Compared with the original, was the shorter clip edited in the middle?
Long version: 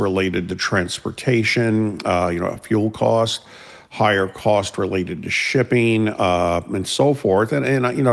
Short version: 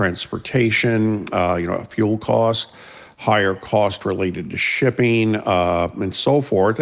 no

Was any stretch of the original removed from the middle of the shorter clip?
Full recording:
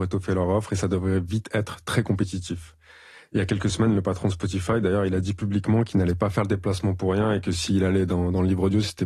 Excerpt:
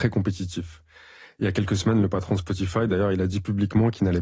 no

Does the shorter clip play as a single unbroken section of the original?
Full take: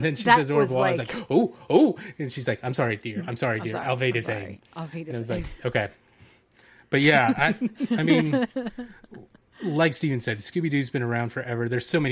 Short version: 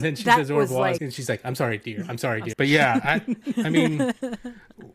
no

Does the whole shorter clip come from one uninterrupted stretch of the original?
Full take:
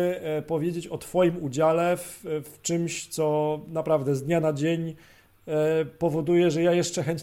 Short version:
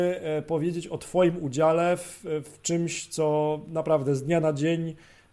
yes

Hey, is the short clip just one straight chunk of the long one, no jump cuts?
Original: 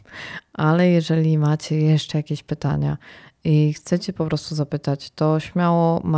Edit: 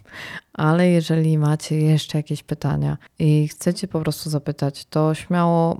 no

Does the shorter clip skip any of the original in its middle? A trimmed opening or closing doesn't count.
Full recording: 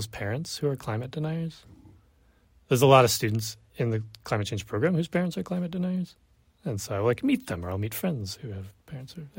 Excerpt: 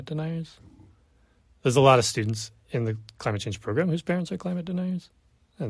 no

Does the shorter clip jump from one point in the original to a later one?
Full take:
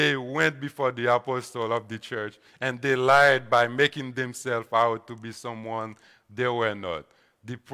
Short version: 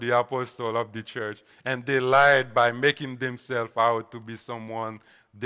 no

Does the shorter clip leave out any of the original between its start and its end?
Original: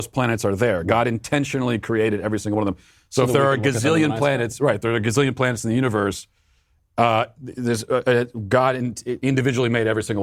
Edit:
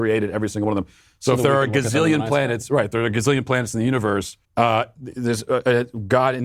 yes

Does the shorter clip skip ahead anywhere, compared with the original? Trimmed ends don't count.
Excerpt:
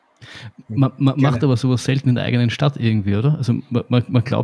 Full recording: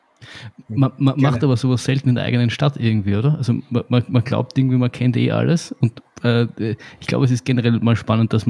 no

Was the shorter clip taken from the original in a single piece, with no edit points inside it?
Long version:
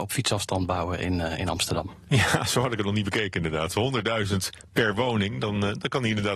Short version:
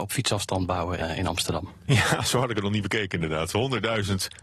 no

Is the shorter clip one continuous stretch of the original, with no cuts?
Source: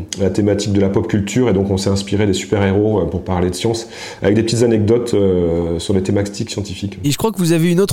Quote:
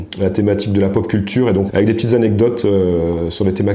no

